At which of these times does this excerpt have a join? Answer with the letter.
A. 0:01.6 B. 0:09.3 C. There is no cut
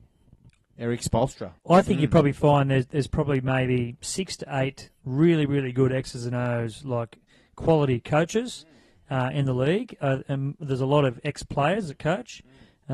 A